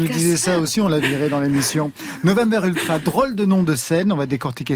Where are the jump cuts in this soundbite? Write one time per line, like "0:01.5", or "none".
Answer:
none